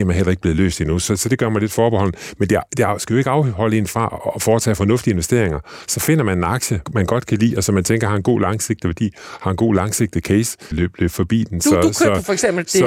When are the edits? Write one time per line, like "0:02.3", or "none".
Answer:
0:06.9
0:10.7

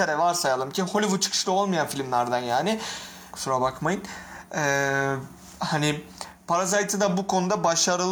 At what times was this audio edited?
0:03.3

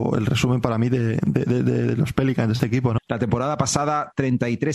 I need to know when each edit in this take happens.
0:03.0

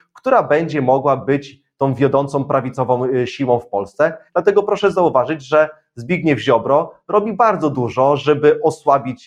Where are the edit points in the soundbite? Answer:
0:04.3

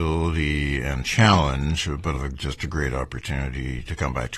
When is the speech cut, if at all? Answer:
0:02.1

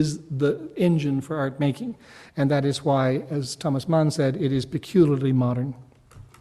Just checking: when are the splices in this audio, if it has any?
none

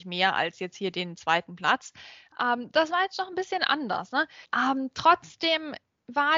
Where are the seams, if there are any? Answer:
0:04.4

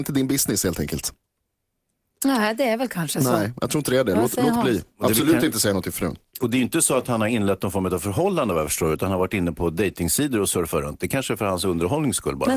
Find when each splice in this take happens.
none

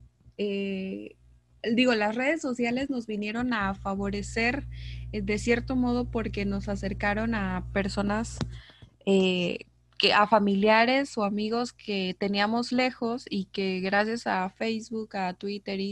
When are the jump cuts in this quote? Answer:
none

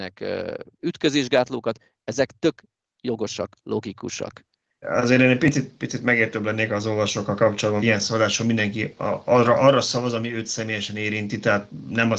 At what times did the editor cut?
0:04.8
0:07.8

